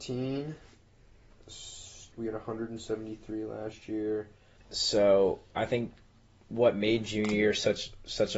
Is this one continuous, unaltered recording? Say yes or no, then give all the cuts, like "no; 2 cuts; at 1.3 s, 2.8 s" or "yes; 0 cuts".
no; 2 cuts; at 2.1 s, 4.6 s